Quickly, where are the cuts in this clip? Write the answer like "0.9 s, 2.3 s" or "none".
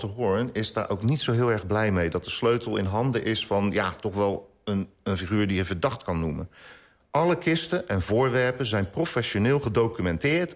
none